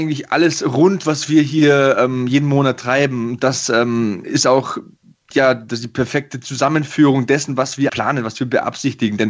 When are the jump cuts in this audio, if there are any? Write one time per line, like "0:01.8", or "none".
0:07.9